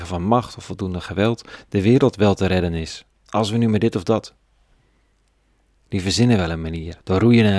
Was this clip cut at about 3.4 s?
no; 1 cut; at 5.7 s

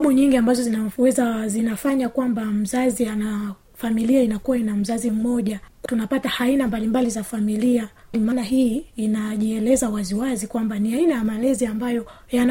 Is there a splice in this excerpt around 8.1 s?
yes; 1 cut; at 8.1 s

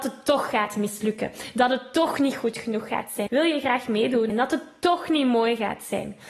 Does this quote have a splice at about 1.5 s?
no; 2 cuts; at 3.3 s, 4.3 s

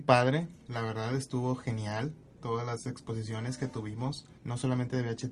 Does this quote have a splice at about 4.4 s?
yes; 1 cut; at 4.4 s

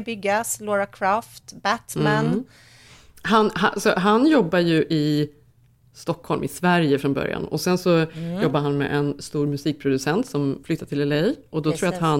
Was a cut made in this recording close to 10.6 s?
yes; 1 cut; at 10.6 s

